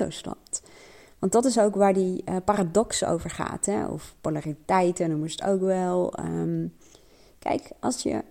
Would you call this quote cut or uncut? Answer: uncut